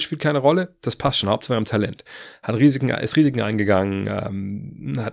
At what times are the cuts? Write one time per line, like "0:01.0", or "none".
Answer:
none